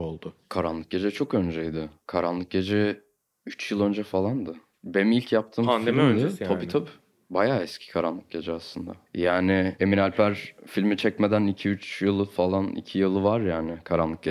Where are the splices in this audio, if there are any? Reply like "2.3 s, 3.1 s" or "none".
none